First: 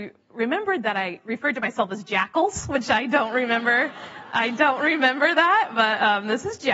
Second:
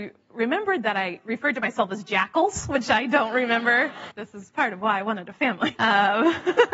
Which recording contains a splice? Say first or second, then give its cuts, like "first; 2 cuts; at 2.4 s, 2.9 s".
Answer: second; 2 cuts; at 4.1 s, 5.7 s